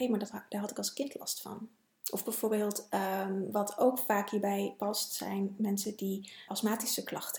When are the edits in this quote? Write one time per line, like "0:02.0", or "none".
0:06.5